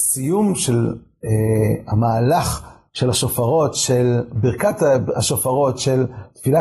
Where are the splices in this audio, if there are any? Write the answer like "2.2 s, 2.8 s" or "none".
none